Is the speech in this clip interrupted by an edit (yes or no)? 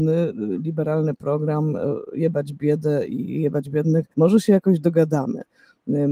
yes